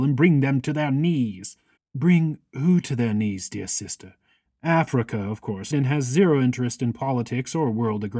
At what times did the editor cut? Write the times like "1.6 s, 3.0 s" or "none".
1.8 s, 4.5 s, 5.7 s